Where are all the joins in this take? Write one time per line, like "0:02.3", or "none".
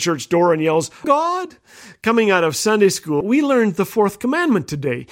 0:01.0
0:03.2